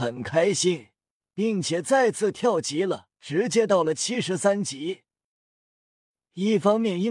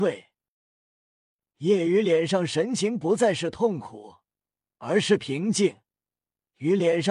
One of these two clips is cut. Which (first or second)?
first